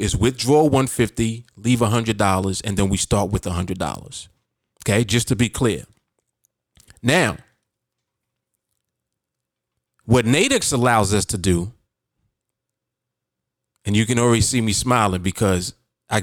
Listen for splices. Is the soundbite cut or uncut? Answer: uncut